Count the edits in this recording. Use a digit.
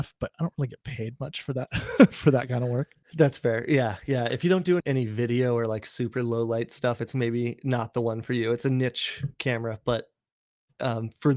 2